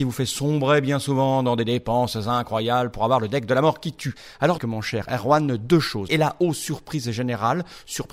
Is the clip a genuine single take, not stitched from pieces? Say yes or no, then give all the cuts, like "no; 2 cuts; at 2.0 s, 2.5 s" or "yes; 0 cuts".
no; 2 cuts; at 4.6 s, 6.1 s